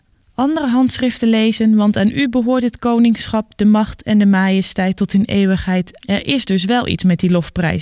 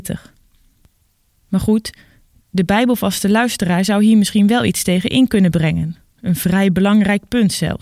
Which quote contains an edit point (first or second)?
first